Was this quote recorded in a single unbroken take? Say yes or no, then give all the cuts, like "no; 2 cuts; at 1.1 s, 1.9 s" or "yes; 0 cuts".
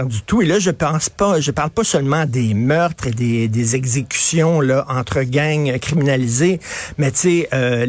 yes; 0 cuts